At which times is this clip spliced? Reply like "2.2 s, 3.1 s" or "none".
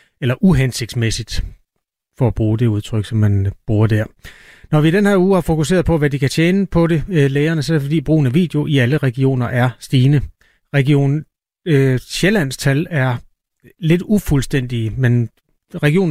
none

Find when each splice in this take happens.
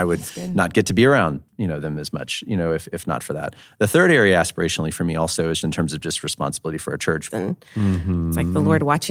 5.6 s, 7.3 s

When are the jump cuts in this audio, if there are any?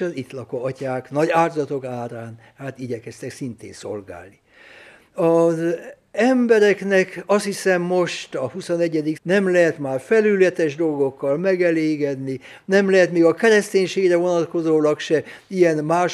9.1 s

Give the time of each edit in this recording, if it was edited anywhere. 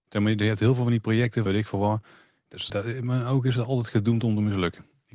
1.5 s, 2.7 s

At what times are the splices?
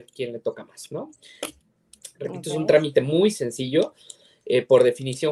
1.4 s

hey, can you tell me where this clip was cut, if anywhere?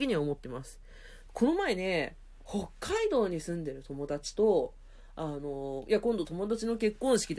none

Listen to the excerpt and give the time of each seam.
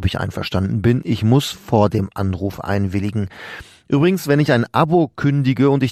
none

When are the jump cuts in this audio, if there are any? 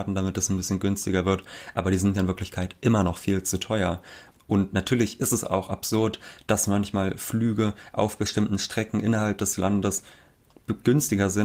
4.3 s

